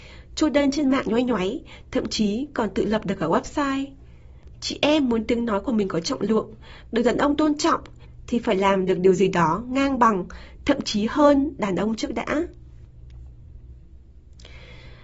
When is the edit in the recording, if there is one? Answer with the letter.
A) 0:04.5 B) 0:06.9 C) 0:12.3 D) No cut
A